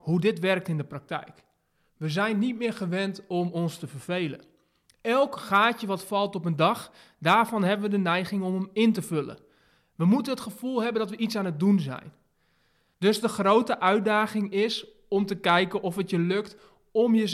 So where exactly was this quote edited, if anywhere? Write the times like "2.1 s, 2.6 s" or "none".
none